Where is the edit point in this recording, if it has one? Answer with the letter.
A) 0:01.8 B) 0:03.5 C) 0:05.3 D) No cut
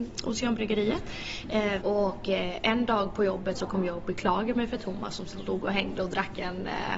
A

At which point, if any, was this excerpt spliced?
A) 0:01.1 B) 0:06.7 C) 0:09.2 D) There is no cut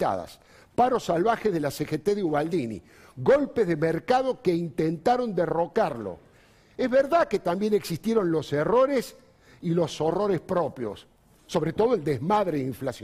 D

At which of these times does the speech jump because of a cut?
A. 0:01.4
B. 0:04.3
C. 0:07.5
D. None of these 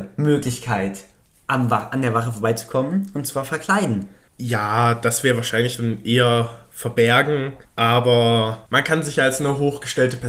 B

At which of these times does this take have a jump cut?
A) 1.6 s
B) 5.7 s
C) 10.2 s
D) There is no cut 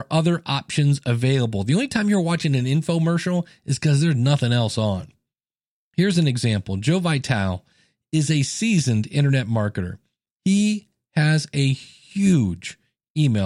D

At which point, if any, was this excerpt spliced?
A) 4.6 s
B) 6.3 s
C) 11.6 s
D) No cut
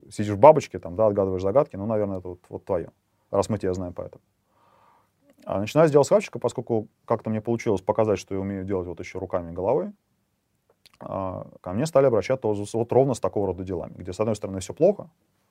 C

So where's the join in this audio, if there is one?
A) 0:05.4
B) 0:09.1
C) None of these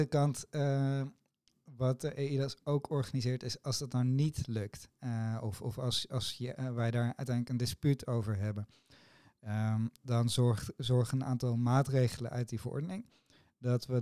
C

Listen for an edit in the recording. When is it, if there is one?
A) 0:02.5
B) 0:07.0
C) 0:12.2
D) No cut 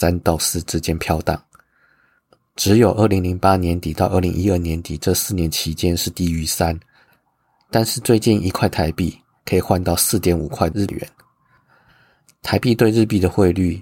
C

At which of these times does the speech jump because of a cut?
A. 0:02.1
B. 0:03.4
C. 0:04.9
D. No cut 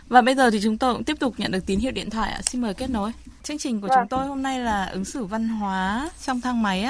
B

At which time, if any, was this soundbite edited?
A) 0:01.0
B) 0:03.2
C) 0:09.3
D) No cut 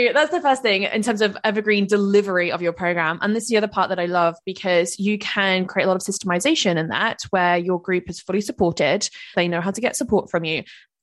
C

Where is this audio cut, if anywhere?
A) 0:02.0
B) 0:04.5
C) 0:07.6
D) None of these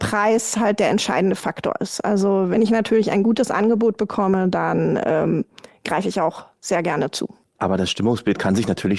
C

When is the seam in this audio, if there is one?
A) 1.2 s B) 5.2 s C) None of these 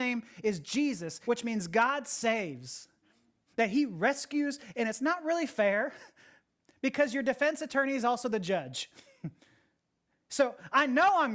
A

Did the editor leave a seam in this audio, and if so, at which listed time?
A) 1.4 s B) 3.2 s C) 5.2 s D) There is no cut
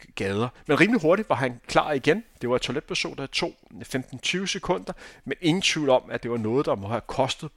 D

